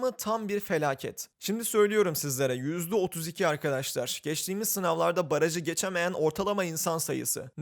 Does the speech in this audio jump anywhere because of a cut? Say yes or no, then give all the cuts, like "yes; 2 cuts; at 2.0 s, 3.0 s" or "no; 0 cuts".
no; 0 cuts